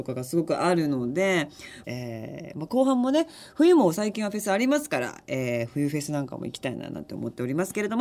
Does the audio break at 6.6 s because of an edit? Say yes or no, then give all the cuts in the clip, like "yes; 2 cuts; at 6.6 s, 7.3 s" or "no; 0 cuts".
no; 1 cut; at 1.8 s